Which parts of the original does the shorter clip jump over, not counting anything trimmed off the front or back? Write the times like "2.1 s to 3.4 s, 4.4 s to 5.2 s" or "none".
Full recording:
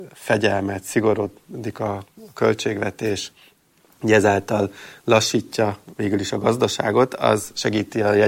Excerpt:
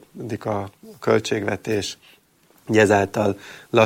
none